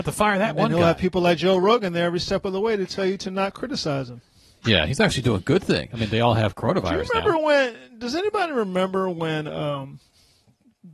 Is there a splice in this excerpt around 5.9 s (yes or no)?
yes